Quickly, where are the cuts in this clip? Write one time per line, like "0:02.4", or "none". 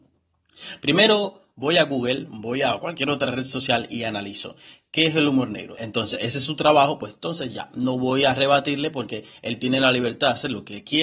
0:05.7